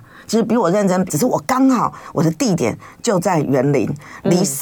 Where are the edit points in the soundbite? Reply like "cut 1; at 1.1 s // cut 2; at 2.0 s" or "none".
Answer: cut 1; at 1.1 s